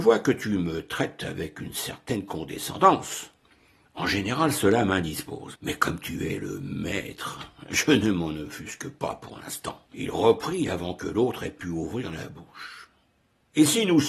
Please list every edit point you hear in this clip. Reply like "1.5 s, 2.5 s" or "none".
5.5 s, 9.8 s